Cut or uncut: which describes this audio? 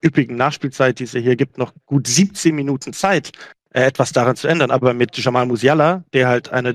uncut